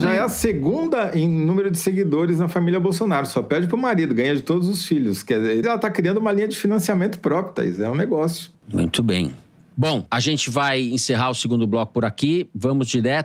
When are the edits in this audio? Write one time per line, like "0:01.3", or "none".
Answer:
0:05.6
0:08.5